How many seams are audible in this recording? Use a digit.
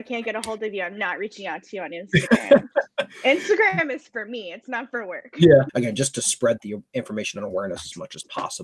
1